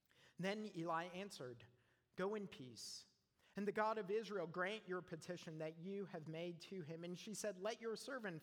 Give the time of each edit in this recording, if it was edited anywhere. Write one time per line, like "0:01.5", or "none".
none